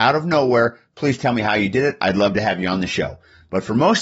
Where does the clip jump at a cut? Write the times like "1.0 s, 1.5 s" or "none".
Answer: none